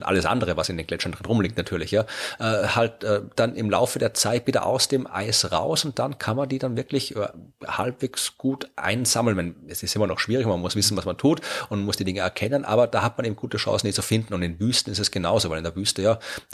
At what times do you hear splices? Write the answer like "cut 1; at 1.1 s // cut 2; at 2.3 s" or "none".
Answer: none